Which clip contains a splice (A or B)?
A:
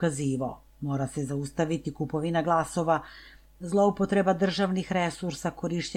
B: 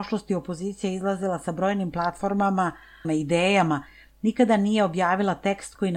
B